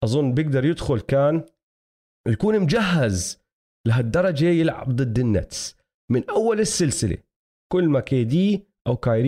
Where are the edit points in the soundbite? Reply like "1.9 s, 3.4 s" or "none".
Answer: none